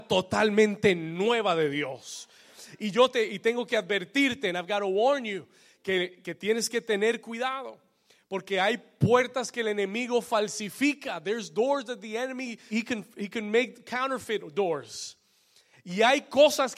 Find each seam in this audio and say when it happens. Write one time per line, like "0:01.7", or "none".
0:12.7
0:15.7